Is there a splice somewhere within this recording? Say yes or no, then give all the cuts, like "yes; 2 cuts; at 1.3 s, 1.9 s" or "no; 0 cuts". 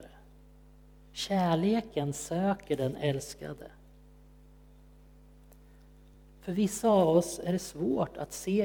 no; 0 cuts